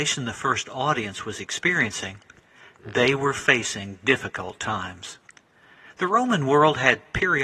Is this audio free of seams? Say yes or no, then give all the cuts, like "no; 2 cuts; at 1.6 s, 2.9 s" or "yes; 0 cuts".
yes; 0 cuts